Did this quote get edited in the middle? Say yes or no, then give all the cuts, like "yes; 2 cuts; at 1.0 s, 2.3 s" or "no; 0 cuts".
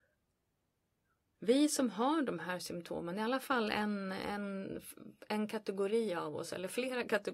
yes; 1 cut; at 1.4 s